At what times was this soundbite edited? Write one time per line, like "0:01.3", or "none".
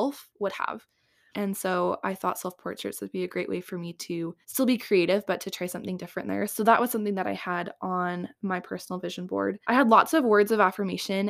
0:01.3
0:04.4
0:09.6